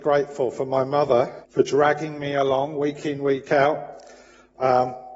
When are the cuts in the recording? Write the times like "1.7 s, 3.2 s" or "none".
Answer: 1.4 s